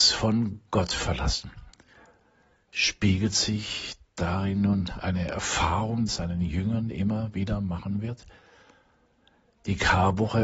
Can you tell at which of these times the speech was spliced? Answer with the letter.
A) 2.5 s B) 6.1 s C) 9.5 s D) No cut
B